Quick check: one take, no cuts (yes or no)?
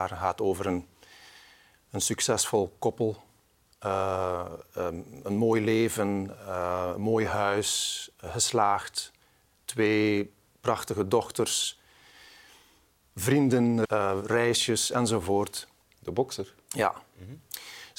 no